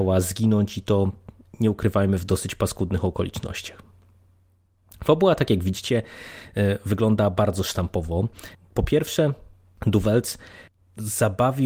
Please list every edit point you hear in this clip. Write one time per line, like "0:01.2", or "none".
0:08.5